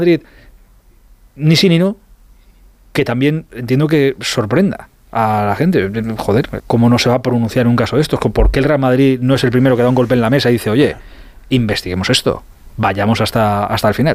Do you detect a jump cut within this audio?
yes; 1 cut; at 6.6 s

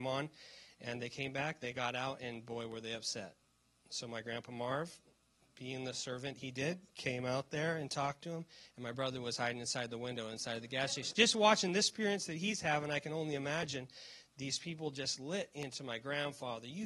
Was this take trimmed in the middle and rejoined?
yes; 1 cut; at 11.1 s

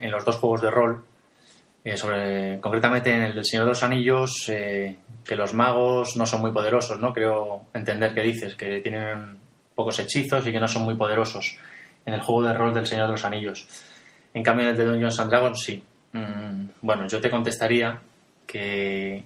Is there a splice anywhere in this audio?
yes; 1 cut; at 5.3 s

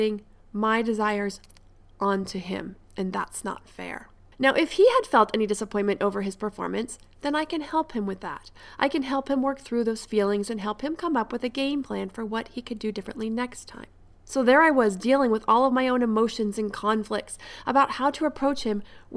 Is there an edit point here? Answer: no; 0 cuts

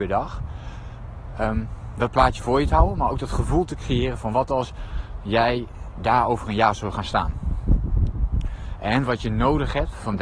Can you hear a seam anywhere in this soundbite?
no; 0 cuts

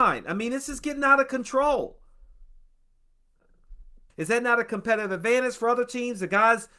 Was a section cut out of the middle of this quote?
yes; 1 cut; at 4.1 s

